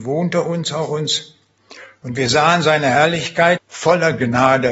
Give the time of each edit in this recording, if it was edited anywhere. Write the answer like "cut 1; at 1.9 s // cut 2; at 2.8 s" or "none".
cut 1; at 3.6 s

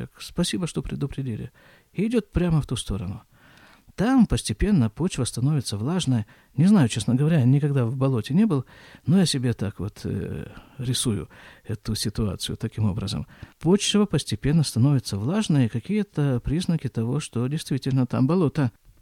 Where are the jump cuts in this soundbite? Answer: cut 1; at 13.5 s

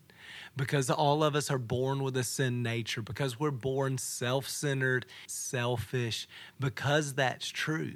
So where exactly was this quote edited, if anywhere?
cut 1; at 5.3 s

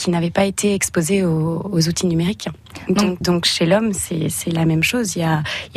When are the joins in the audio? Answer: cut 1; at 3.2 s

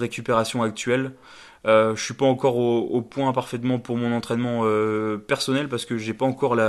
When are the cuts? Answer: none

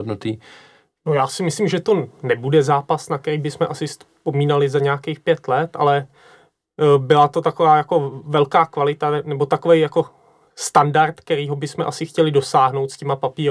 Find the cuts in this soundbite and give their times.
cut 1; at 0.9 s

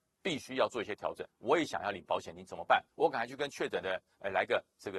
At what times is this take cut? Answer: cut 1; at 1.3 s

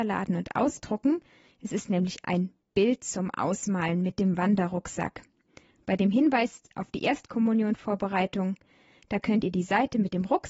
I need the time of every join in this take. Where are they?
cut 1; at 1.5 s

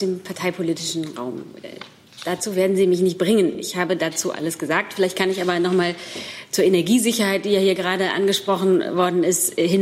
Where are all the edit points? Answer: none

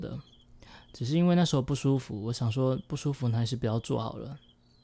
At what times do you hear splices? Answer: none

